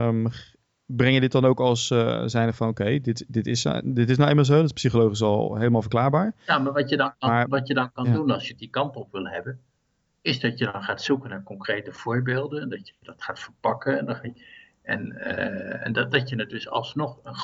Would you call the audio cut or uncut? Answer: uncut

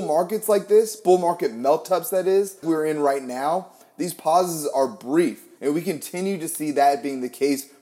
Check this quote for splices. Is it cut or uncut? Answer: cut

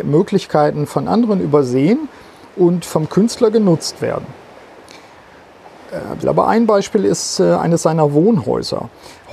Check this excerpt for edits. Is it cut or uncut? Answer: cut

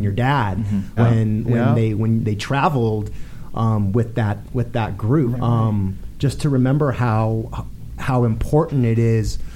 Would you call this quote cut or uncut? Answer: cut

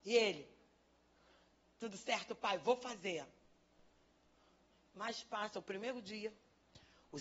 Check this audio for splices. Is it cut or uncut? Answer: uncut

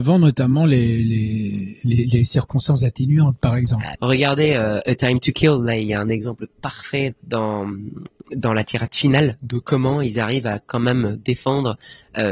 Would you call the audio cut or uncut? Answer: cut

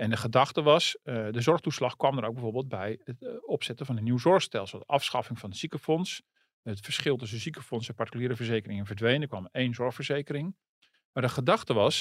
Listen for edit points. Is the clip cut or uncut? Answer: uncut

